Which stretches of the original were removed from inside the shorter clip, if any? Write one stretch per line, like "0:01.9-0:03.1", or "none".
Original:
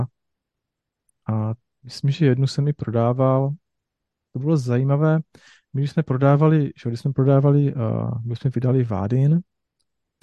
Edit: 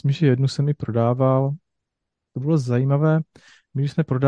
none